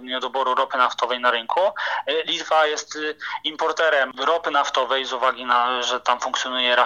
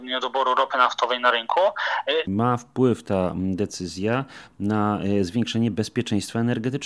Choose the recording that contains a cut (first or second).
second